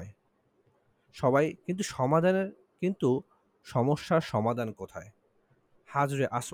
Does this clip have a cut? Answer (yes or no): no